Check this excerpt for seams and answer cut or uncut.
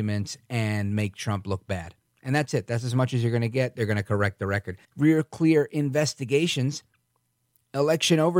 cut